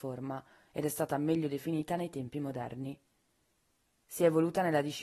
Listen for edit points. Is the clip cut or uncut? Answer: uncut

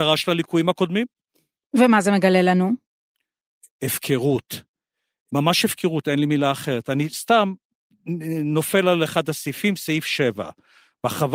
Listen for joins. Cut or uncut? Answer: uncut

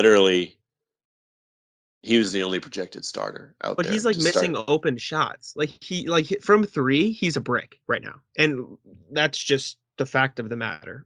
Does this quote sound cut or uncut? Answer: uncut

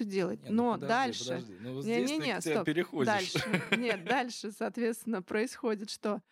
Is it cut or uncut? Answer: uncut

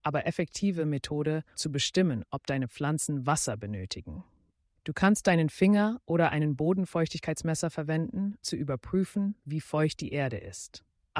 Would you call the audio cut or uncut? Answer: cut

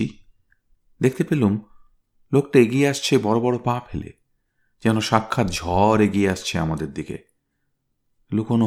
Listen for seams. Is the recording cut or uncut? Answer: uncut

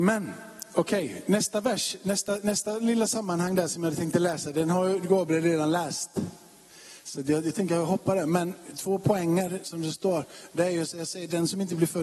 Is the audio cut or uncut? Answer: uncut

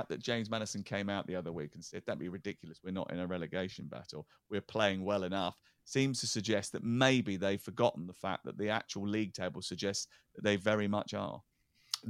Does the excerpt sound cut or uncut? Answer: uncut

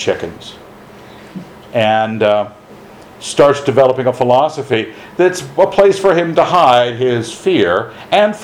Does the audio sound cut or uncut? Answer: uncut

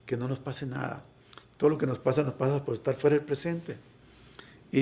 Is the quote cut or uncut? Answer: uncut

